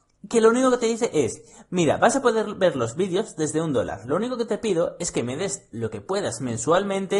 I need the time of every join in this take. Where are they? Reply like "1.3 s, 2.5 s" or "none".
none